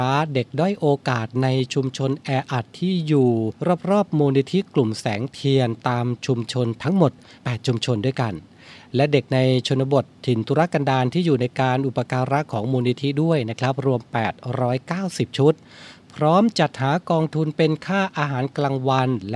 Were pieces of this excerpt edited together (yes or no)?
no